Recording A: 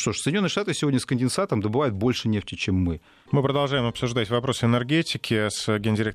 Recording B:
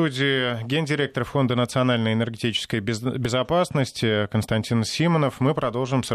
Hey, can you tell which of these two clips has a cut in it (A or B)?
A